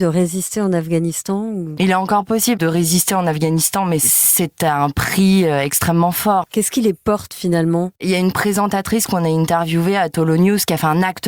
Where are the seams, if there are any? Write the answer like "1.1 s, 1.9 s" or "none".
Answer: 6.4 s